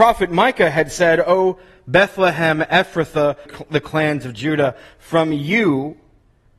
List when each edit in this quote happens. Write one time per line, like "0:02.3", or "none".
0:03.5

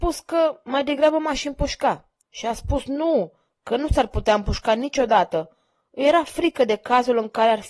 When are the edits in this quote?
0:02.2

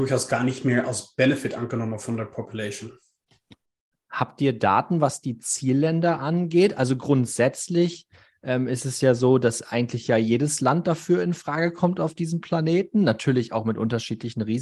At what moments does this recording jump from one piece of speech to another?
none

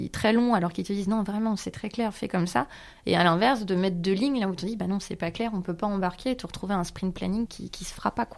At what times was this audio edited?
0:07.5

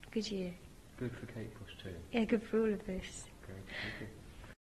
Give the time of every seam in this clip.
none

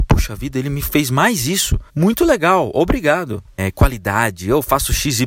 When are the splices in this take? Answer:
0:01.9
0:03.6

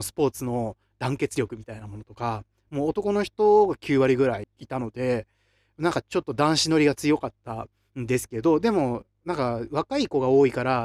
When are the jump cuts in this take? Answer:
0:04.4

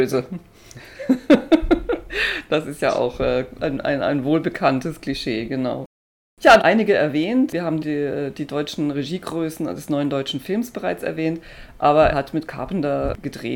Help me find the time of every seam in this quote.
0:06.6
0:12.1

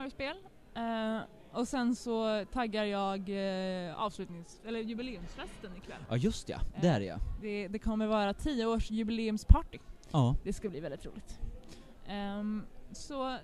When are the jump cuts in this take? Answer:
none

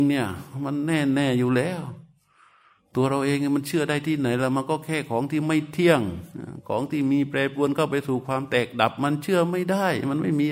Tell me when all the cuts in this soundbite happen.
none

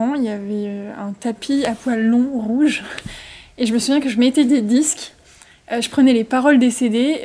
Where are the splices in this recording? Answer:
none

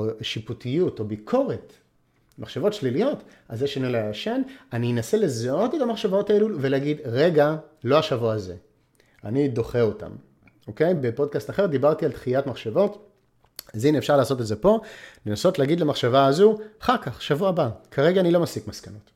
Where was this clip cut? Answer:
none

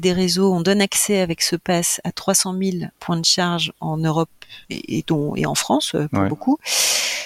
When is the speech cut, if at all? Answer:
0:04.6

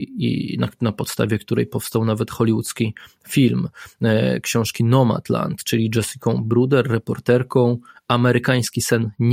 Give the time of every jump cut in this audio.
none

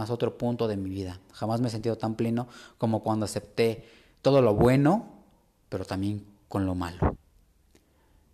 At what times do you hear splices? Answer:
none

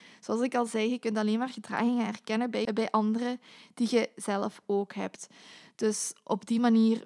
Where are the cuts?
0:02.7

